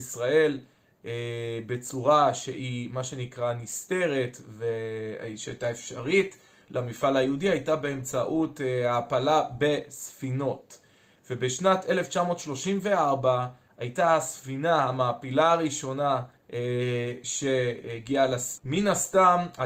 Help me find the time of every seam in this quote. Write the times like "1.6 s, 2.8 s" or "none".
16.4 s, 18.6 s